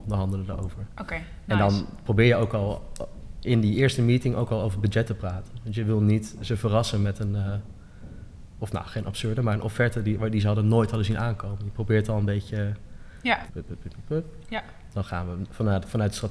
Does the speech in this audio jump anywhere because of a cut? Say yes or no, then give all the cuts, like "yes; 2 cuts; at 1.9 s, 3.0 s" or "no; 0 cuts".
yes; 2 cuts; at 8.6 s, 13.5 s